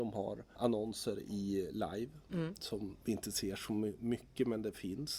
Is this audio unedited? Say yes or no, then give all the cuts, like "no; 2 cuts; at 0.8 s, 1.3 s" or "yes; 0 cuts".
yes; 0 cuts